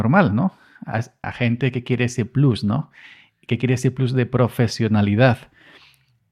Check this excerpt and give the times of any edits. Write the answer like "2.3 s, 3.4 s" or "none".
1.2 s

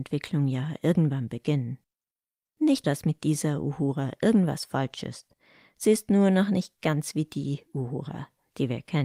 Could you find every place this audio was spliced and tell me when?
2.8 s

